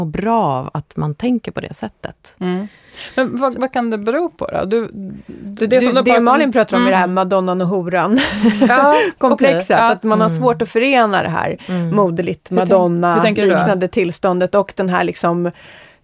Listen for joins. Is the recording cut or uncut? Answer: uncut